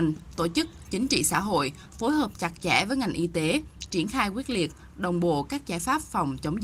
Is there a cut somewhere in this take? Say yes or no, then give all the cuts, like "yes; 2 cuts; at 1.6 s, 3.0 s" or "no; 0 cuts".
no; 0 cuts